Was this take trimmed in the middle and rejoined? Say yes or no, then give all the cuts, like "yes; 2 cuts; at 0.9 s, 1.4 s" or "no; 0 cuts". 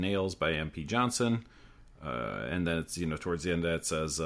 no; 0 cuts